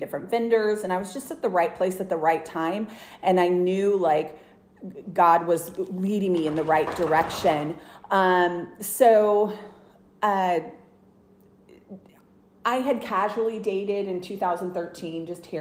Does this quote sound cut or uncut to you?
uncut